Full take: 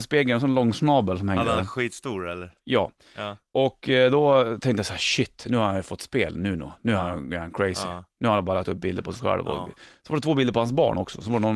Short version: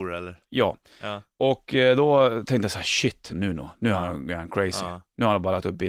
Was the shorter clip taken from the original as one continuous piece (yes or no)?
no